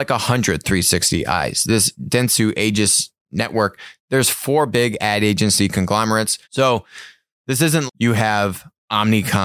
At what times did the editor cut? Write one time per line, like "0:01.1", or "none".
0:06.4
0:07.9